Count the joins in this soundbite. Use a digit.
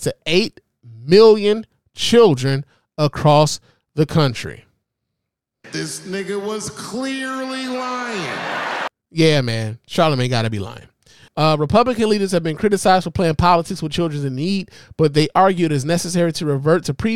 1